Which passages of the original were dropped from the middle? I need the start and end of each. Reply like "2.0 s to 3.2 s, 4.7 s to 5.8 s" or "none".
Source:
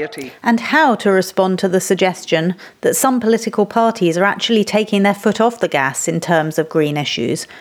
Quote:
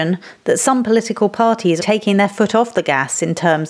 4.2 s to 4.7 s

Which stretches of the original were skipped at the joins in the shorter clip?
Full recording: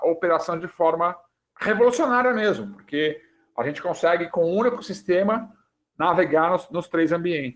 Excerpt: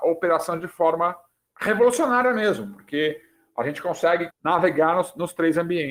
4.3 s to 5.8 s

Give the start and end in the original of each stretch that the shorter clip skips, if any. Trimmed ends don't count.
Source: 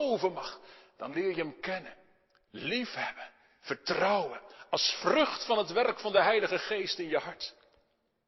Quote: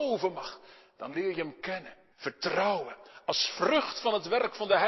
2.1 s to 3.6 s

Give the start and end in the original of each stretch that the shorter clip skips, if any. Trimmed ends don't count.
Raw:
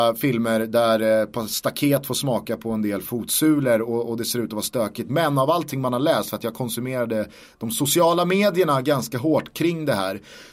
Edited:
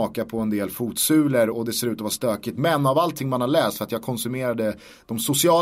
3.8 s to 4.0 s

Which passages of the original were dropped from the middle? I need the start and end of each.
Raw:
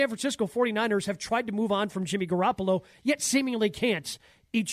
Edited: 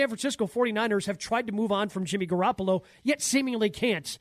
none

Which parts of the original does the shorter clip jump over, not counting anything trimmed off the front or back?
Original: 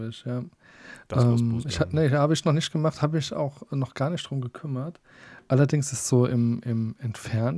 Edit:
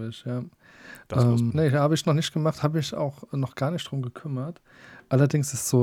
1.5 s to 1.9 s

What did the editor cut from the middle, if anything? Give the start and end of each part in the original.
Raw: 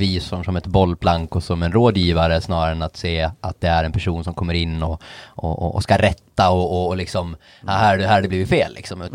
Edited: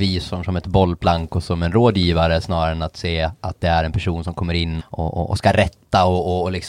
4.8 s to 5.2 s

